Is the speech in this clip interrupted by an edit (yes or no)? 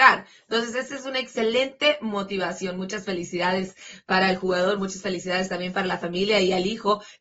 no